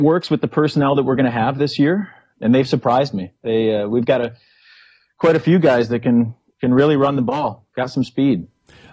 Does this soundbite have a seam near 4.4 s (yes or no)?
no